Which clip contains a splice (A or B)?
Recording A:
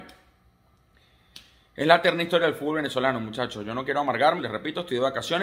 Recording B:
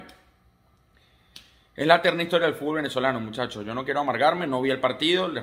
A